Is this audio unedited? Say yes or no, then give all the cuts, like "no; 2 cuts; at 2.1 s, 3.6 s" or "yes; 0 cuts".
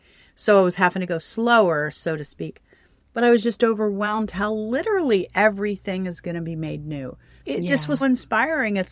no; 1 cut; at 8.0 s